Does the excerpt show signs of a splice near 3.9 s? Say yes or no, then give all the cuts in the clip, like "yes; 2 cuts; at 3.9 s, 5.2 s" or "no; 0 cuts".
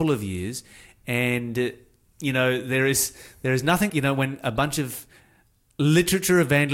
yes; 1 cut; at 3.9 s